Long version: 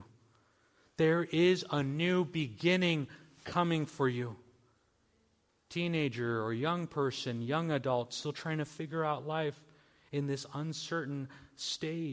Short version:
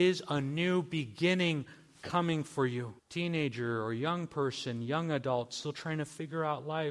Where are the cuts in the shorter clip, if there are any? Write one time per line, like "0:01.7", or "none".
0:03.0